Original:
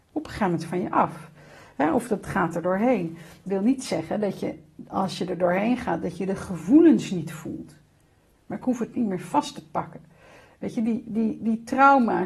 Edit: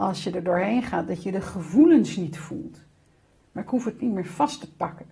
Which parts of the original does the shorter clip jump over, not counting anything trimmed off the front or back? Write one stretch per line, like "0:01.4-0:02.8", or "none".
none